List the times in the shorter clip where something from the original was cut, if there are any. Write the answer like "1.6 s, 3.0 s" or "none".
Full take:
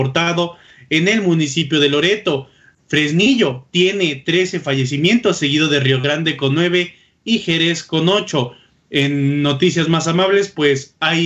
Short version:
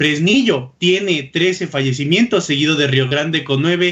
none